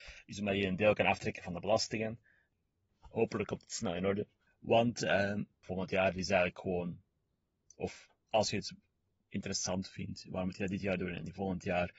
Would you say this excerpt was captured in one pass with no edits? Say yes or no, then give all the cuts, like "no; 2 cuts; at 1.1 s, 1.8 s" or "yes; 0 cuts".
no; 2 cuts; at 2.9 s, 5.6 s